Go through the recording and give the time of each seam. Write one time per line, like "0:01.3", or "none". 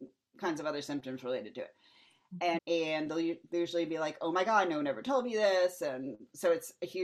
0:02.6